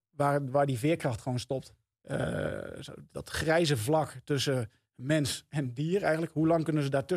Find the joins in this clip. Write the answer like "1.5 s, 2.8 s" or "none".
2.0 s, 3.1 s